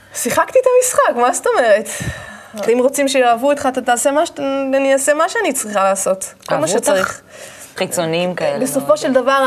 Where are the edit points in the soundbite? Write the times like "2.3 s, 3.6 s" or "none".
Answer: 2.7 s, 7.8 s